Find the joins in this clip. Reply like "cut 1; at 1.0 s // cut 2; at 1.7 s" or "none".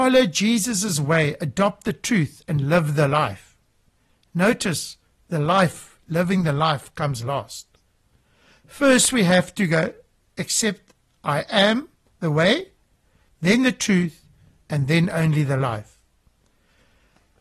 none